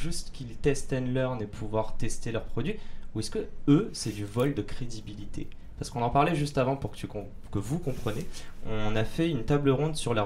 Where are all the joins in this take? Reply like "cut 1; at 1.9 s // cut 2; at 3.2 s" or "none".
none